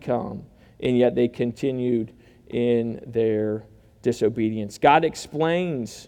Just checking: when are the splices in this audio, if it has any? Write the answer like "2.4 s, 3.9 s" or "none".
none